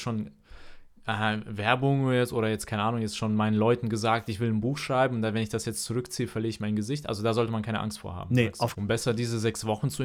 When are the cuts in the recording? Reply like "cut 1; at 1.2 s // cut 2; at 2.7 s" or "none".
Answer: cut 1; at 8.7 s